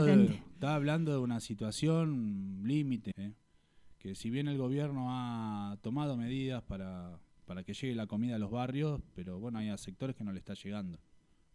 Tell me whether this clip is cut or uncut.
cut